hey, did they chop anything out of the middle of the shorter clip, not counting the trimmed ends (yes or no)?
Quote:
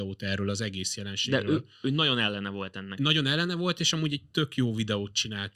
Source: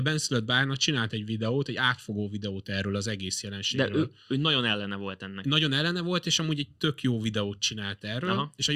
no